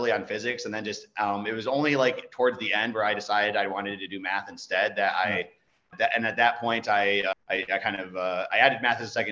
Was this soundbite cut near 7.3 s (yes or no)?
yes